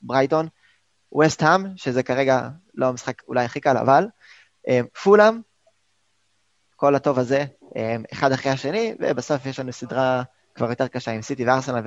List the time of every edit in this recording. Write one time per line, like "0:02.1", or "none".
none